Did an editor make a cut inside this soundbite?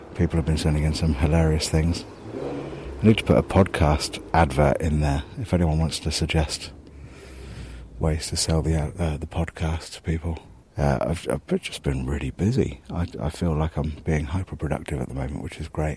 yes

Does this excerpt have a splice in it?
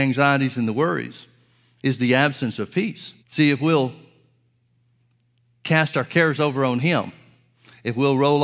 yes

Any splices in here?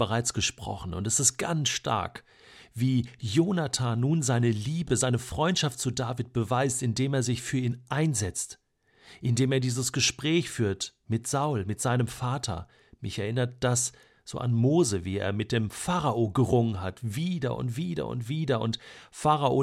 no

